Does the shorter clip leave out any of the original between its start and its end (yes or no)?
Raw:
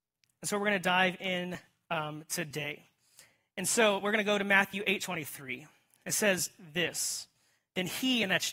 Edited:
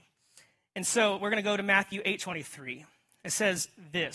no